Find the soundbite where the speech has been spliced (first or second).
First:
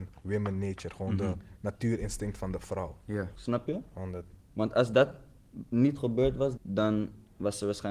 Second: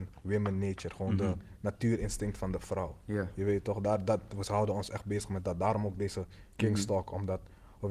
first